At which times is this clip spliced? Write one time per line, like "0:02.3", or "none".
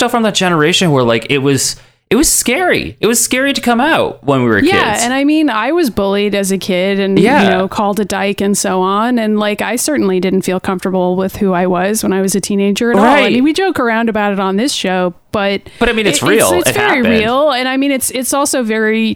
none